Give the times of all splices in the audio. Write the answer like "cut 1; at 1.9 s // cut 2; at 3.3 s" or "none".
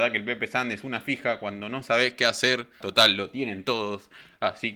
cut 1; at 2.8 s